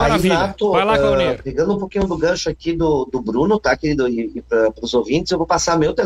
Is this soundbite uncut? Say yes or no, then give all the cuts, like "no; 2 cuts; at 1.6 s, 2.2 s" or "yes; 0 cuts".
yes; 0 cuts